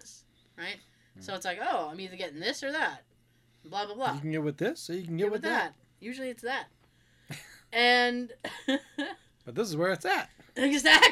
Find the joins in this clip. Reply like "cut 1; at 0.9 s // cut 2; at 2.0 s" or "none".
none